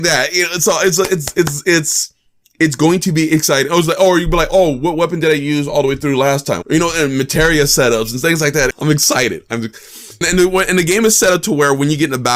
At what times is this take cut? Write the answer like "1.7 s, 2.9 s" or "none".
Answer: 6.6 s, 8.7 s, 10.2 s